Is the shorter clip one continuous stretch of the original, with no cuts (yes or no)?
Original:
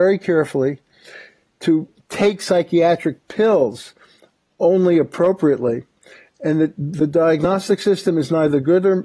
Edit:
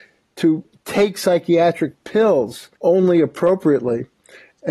no